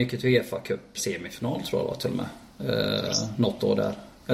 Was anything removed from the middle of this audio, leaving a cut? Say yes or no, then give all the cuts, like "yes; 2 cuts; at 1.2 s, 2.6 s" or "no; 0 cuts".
yes; 1 cut; at 1.0 s